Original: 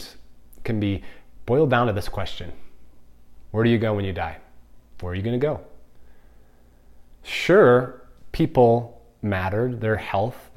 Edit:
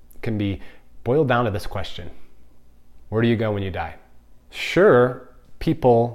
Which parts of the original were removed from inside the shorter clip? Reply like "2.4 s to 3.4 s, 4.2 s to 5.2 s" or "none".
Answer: 4.9 s to 7.2 s